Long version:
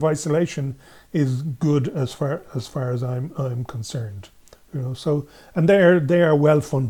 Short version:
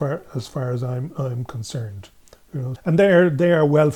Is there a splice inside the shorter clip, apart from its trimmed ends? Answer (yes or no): yes